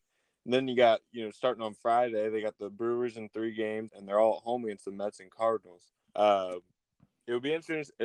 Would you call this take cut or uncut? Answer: cut